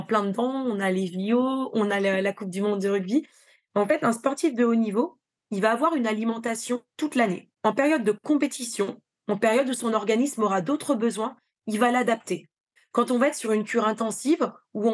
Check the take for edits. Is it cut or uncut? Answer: cut